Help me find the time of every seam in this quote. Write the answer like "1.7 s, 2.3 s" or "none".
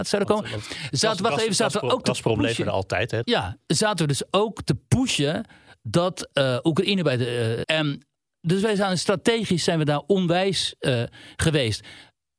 3.2 s, 7.6 s